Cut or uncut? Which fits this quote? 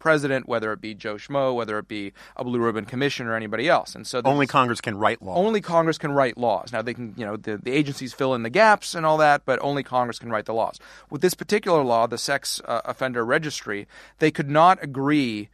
uncut